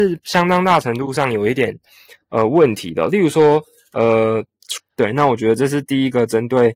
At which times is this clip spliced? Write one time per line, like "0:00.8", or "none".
0:04.8